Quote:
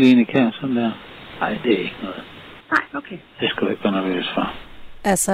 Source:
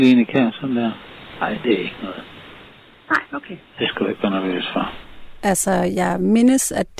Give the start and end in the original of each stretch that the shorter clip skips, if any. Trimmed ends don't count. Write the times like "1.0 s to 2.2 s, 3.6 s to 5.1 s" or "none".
2.6 s to 3.0 s